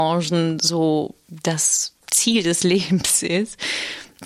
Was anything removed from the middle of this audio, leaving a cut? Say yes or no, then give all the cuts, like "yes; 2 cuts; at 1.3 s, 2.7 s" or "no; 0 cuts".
yes; 1 cut; at 2.0 s